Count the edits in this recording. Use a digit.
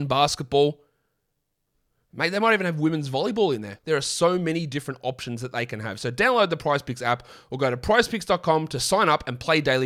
1